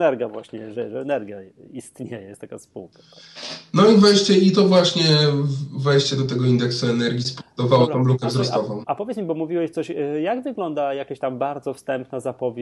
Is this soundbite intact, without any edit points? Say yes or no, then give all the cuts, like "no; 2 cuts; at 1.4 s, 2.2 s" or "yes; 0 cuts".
no; 1 cut; at 8.8 s